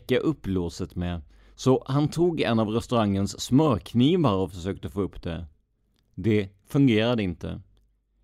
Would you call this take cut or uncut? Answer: uncut